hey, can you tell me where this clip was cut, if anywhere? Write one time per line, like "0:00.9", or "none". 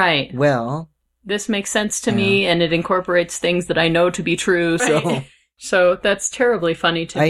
0:04.8